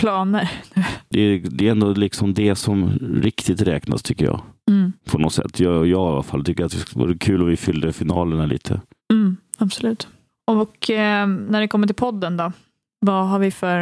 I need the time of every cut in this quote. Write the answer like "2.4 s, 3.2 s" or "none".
1.1 s